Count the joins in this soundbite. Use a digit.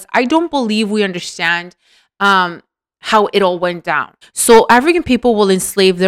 1